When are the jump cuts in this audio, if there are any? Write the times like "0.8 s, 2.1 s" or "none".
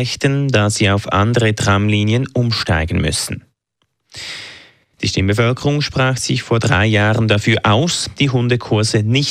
4.9 s